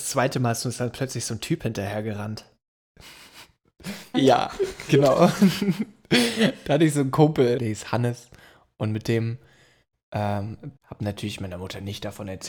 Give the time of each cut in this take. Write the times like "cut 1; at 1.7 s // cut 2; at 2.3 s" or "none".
cut 1; at 4.1 s // cut 2; at 7.6 s // cut 3; at 10.8 s